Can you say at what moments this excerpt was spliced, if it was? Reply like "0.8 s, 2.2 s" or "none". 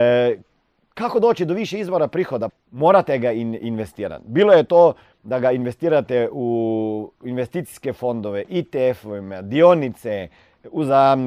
2.5 s